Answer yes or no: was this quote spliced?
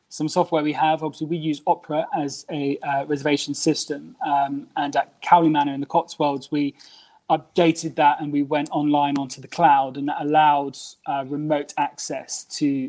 no